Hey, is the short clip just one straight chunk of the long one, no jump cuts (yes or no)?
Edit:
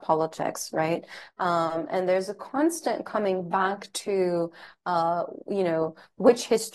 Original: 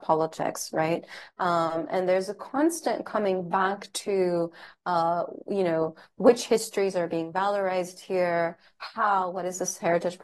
yes